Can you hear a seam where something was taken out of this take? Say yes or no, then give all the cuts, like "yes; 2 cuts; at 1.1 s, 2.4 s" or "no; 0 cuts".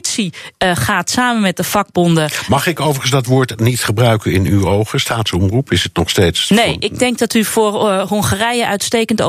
no; 0 cuts